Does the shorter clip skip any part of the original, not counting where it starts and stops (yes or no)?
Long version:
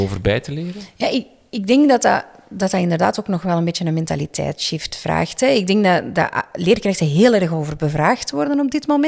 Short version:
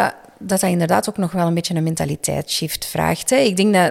no